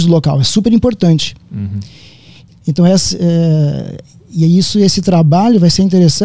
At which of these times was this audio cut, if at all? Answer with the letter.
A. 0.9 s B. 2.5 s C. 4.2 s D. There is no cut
B